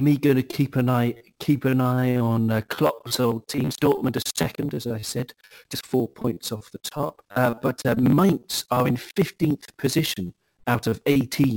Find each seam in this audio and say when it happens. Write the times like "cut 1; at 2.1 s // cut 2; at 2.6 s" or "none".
cut 1; at 7.2 s